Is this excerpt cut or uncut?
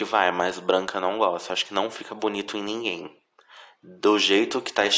uncut